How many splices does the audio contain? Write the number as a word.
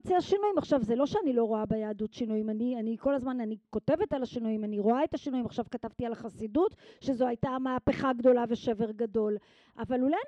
zero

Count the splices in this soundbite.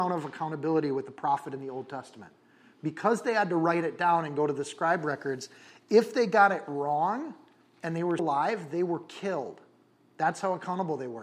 one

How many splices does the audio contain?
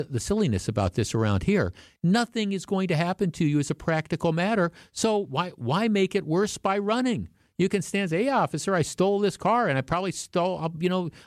one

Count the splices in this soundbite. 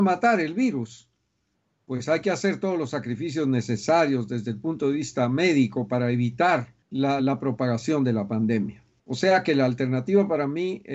one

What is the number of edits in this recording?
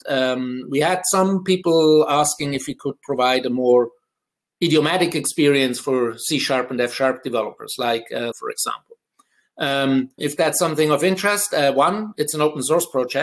two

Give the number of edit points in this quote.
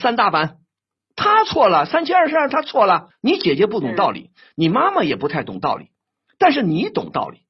two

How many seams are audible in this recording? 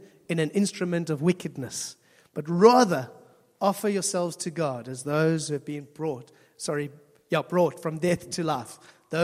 zero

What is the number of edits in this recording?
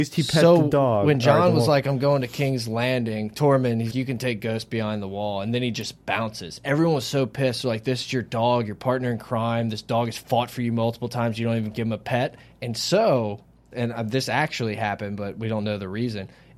two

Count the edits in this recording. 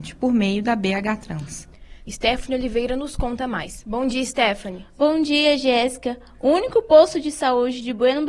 one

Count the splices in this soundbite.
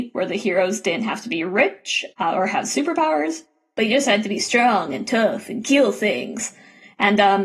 one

